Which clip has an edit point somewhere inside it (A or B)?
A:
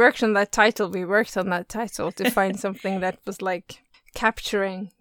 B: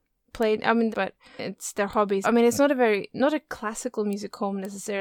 B